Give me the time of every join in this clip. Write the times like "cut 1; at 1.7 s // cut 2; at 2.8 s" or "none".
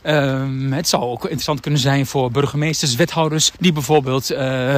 cut 1; at 3.6 s